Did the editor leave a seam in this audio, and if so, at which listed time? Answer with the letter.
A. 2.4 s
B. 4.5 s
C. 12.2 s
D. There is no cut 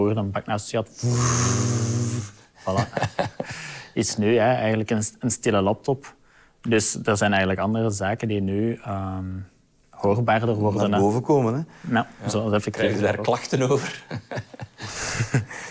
D